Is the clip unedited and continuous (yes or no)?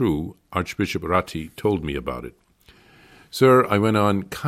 yes